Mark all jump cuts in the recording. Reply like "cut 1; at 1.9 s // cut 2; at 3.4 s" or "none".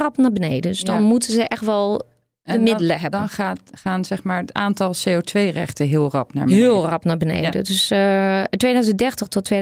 none